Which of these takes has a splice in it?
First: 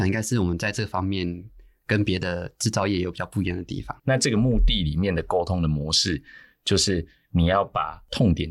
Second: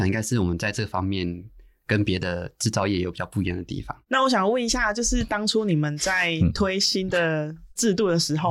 first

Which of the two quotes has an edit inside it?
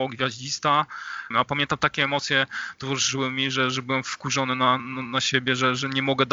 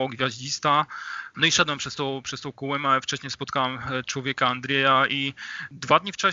first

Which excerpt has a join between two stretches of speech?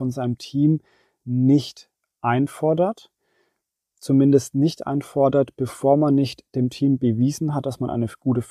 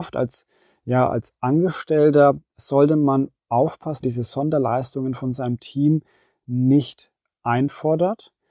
second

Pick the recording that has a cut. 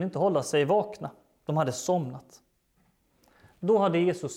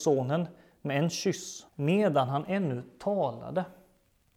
second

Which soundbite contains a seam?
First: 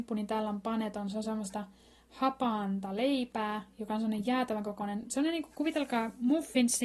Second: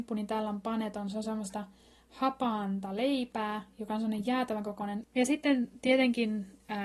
second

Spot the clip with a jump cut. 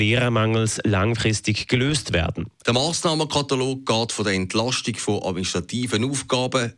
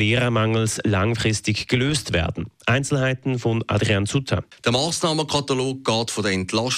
first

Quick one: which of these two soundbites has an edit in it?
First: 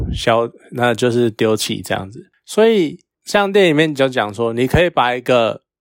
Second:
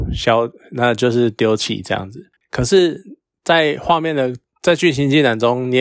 second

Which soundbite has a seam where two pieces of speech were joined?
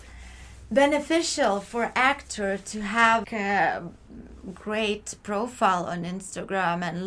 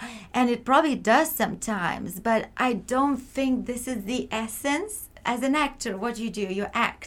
first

